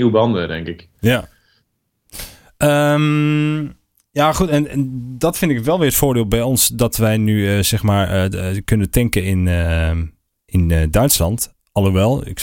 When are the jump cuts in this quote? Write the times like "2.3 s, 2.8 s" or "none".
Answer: none